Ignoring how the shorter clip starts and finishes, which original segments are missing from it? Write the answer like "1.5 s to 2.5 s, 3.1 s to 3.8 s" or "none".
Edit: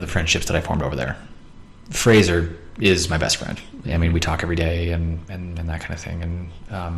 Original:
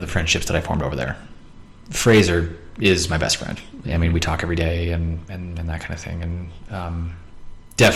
none